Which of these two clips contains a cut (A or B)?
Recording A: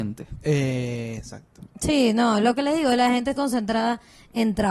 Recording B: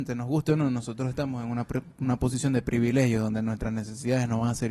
A